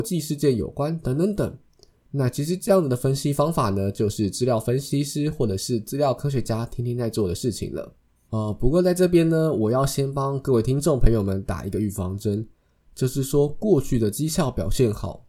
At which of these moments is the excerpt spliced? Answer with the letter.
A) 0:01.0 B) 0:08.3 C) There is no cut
B